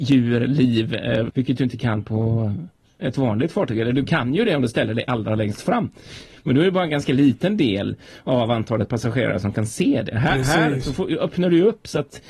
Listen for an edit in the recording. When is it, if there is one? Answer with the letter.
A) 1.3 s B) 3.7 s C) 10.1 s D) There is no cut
A